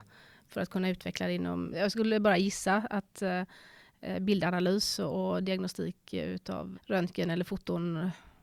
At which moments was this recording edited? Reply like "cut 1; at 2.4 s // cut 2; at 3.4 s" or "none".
cut 1; at 1.7 s // cut 2; at 6.7 s